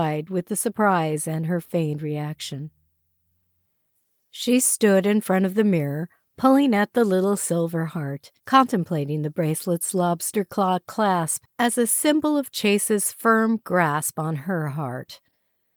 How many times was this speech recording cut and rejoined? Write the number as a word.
one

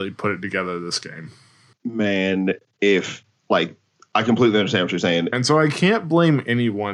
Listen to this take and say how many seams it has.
one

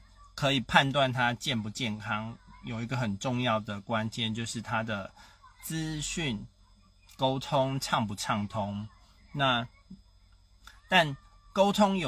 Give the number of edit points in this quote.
zero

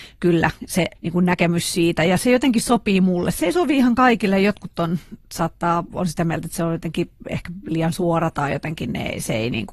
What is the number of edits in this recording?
one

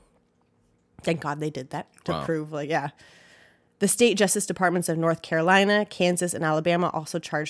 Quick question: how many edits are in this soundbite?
zero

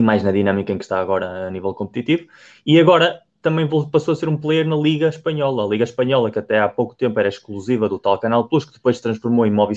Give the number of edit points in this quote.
zero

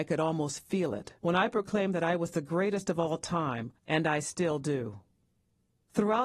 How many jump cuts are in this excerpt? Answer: two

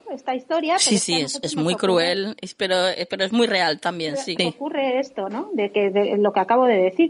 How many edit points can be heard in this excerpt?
one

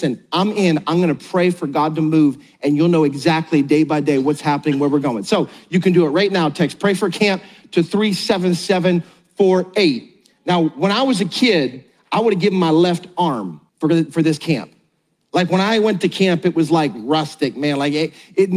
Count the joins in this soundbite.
one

